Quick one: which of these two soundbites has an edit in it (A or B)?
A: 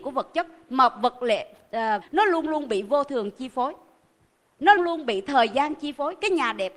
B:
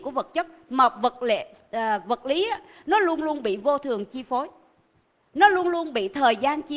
A